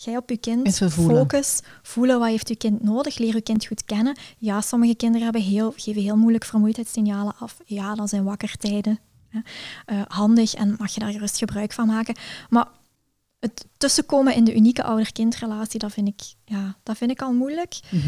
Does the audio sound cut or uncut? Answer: uncut